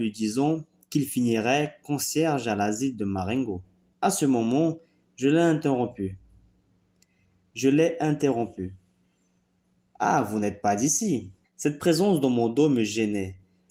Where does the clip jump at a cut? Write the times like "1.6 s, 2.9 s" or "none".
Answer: 3.9 s, 11.4 s